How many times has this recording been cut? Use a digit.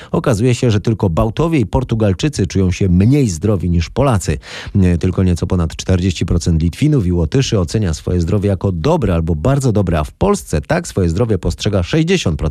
0